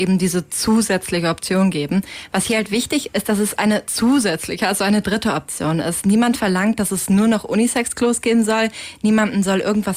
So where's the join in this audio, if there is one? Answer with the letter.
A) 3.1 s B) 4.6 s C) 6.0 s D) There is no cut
A